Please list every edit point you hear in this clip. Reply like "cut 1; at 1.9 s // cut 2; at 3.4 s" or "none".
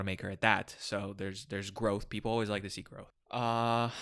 cut 1; at 3.1 s